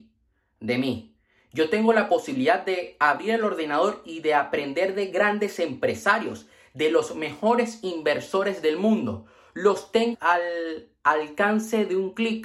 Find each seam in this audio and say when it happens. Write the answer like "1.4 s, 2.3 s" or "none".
10.1 s

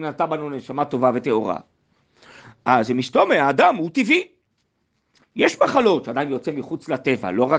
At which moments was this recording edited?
none

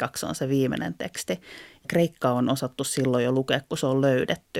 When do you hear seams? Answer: none

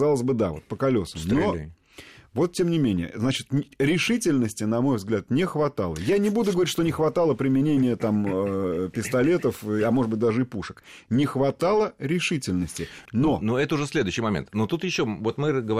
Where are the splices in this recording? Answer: 13.1 s

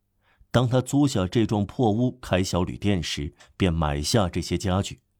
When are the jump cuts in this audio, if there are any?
3.4 s

